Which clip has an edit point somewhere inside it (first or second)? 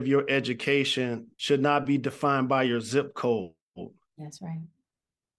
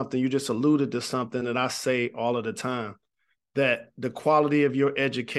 first